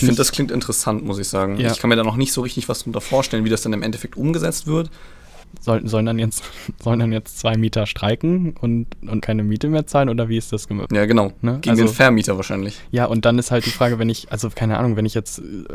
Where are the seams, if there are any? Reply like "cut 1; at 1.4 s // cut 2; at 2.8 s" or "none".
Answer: cut 1; at 5.4 s // cut 2; at 9.2 s // cut 3; at 10.9 s

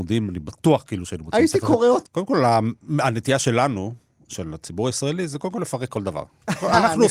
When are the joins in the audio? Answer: cut 1; at 2.1 s

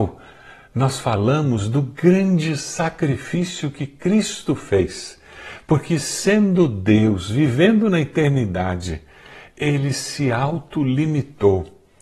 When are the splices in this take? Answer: none

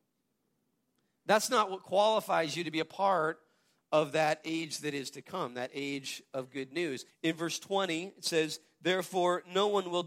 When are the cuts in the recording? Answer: cut 1; at 7.1 s

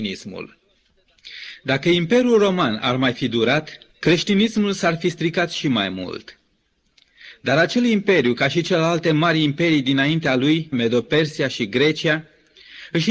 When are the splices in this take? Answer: cut 1; at 3.9 s // cut 2; at 10.7 s

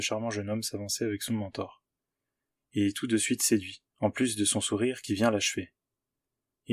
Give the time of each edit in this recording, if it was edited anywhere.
cut 1; at 2.6 s // cut 2; at 3.9 s

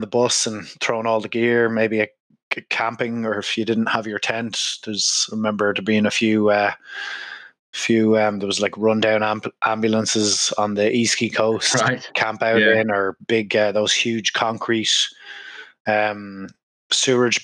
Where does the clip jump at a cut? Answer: none

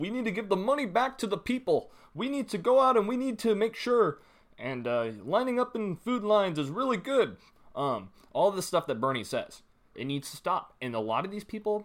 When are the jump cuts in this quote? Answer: cut 1; at 9.9 s

